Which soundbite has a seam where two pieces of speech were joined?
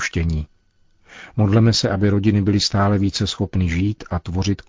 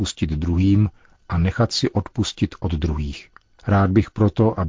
second; 1 cut; at 3.6 s

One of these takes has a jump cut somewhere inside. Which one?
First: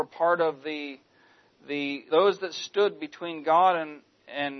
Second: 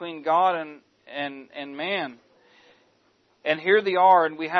first; 1 cut; at 2.1 s

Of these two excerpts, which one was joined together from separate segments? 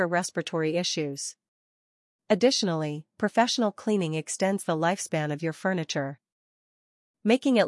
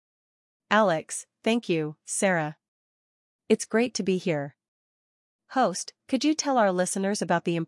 second; 1 cut; at 6.0 s

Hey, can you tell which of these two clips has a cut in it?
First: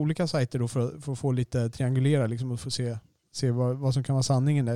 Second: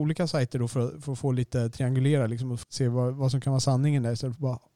second; 1 cut; at 2.6 s

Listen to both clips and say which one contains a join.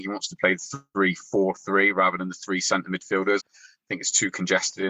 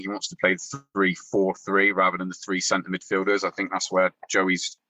first; 1 cut; at 3.4 s

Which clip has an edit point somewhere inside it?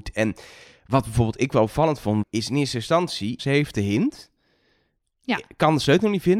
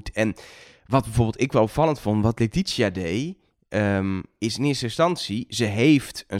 first; 2 cuts; at 2.2 s, 3.4 s

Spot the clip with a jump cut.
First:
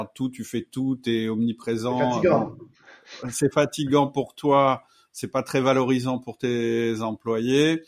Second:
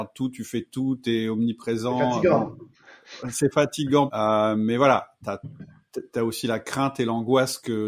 second; 1 cut; at 4.1 s

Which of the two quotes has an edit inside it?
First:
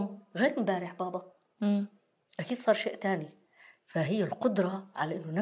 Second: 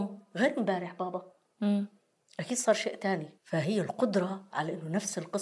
second; 1 cut; at 3.4 s

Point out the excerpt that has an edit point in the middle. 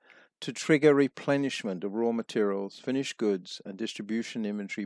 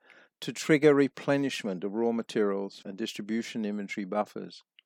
second; 1 cut; at 2.8 s

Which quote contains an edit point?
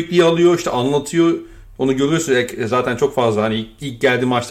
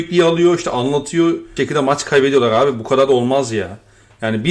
second; 1 cut; at 1.6 s

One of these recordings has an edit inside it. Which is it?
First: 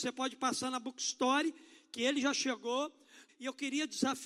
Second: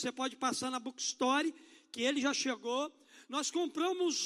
first; 1 cut; at 3.3 s

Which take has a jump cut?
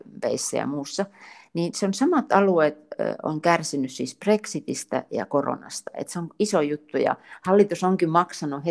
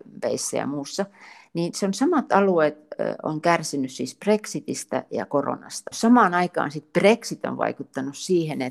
second; 1 cut; at 5.9 s

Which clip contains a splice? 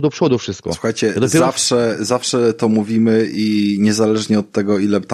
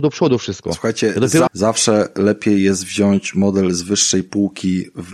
second; 1 cut; at 1.5 s

